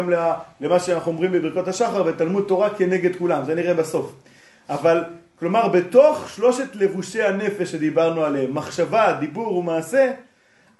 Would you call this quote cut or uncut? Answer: uncut